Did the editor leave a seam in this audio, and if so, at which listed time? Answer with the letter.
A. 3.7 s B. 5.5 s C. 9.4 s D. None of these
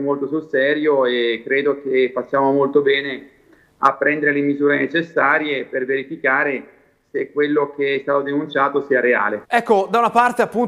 C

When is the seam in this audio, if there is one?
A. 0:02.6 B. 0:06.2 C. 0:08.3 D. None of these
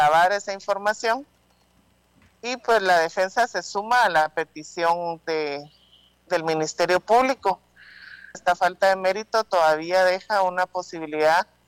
C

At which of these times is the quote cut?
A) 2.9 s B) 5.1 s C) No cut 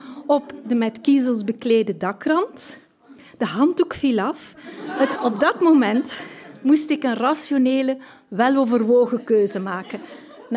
B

